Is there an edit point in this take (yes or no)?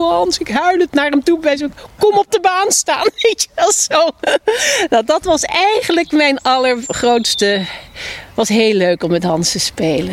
no